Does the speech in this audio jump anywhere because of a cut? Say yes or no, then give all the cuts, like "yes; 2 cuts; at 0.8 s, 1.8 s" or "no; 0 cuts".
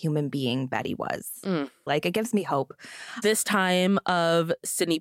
yes; 2 cuts; at 1.9 s, 3.2 s